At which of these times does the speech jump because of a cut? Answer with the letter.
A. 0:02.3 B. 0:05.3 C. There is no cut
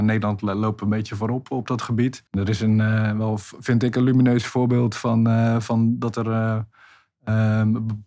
A